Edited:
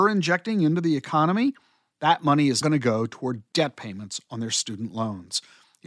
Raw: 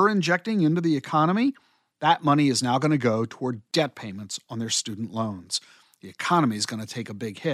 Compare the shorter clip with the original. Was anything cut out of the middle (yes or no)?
yes